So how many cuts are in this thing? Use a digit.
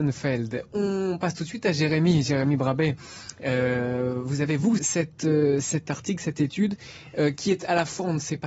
1